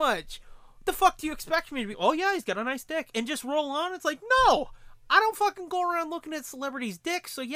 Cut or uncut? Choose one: cut